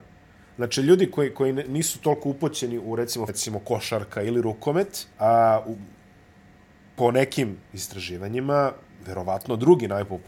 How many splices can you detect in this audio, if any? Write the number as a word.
two